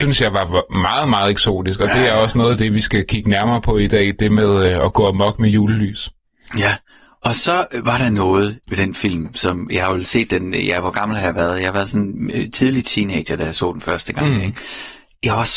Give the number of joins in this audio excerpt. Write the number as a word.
zero